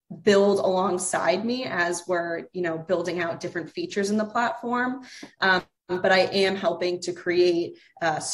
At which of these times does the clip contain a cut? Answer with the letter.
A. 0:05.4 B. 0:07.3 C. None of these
A